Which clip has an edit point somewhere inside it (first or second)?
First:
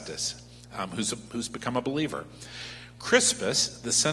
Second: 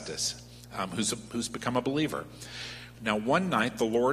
second